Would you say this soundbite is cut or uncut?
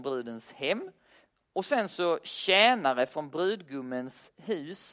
uncut